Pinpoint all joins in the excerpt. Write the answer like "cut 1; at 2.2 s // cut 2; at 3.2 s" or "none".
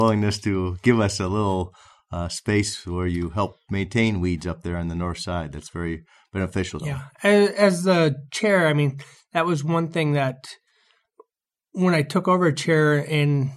cut 1; at 6.8 s

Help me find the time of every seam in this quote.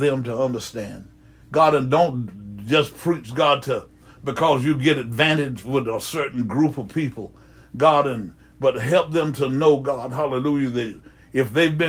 cut 1; at 1.4 s

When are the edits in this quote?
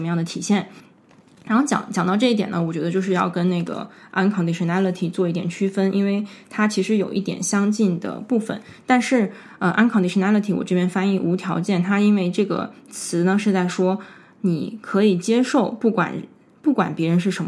none

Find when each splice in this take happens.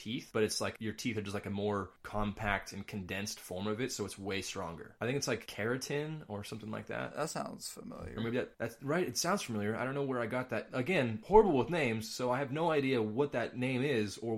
none

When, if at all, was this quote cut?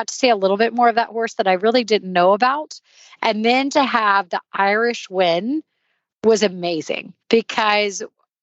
cut 1; at 3.2 s // cut 2; at 7.2 s

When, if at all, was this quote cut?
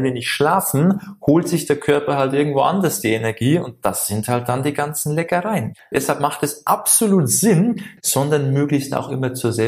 cut 1; at 5.9 s // cut 2; at 8.0 s

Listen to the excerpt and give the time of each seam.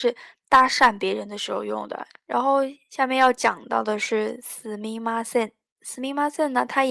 cut 1; at 2.1 s

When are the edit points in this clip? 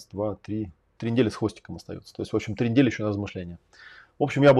cut 1; at 1.0 s

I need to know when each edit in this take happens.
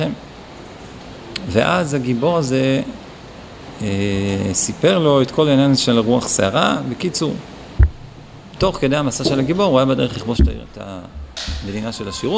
cut 1; at 8.6 s

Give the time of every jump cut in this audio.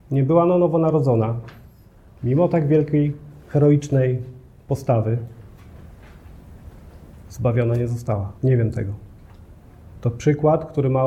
cut 1; at 8.4 s

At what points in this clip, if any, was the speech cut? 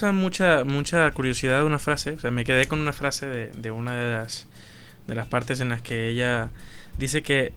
none

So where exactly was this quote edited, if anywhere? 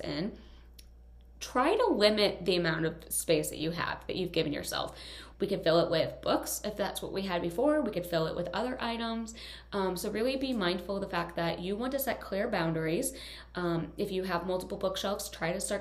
cut 1; at 5.3 s

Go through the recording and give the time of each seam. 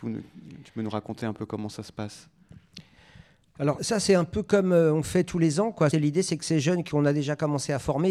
cut 1; at 3.8 s // cut 2; at 5.9 s

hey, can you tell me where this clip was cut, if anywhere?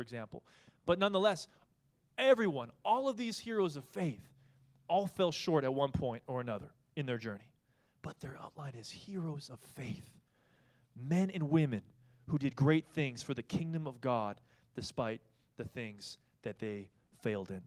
none

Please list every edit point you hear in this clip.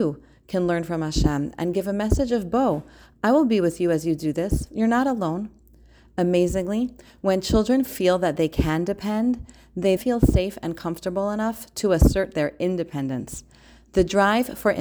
cut 1; at 10.0 s

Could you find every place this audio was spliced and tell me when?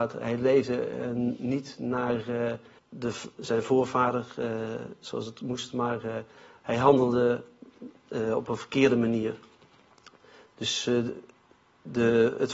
cut 1; at 2.8 s

